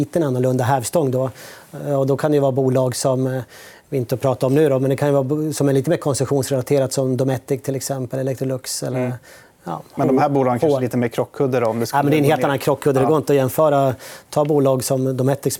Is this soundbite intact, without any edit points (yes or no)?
yes